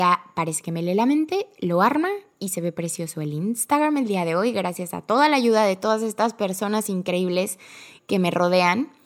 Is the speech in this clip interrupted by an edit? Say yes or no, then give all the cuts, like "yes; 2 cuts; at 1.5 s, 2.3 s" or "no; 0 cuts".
no; 0 cuts